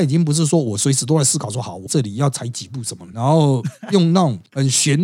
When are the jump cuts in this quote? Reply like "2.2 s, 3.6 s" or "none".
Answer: 1.9 s, 3.1 s